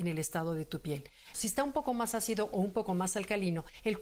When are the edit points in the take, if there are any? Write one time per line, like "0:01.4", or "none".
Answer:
0:01.3